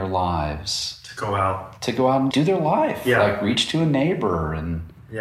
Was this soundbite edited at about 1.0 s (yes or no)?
no